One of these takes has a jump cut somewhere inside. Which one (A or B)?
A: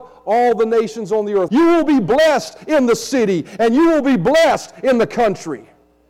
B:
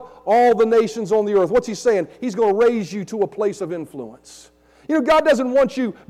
A